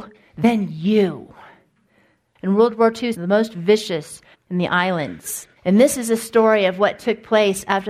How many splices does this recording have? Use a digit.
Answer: 3